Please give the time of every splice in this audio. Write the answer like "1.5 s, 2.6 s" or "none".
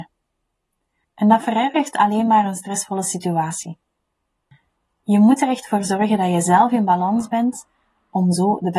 1.0 s